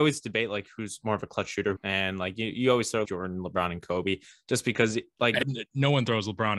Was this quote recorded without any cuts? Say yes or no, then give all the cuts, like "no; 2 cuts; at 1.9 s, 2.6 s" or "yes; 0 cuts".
no; 3 cuts; at 1.8 s, 3.0 s, 5.4 s